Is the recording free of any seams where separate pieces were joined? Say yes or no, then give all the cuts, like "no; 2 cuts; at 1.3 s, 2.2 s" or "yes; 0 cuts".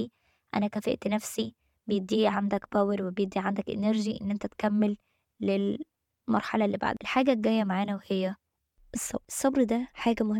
yes; 0 cuts